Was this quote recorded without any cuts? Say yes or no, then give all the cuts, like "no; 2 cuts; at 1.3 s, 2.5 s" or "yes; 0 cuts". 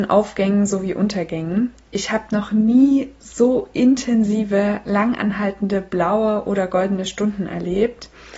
yes; 0 cuts